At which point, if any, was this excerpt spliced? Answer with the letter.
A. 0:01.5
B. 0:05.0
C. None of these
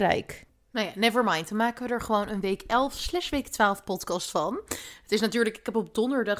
C